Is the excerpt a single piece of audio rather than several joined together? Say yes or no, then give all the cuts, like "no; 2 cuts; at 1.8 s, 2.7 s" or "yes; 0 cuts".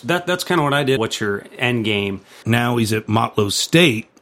no; 2 cuts; at 1.0 s, 2.4 s